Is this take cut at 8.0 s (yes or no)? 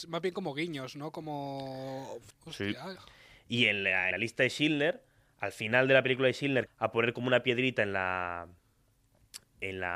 no